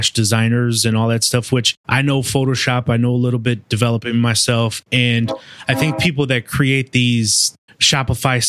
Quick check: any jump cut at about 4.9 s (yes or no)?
yes